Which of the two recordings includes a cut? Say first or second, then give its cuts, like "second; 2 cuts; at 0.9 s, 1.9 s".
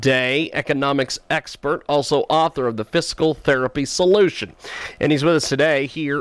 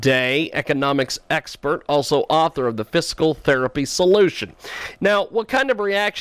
second; 1 cut; at 5.0 s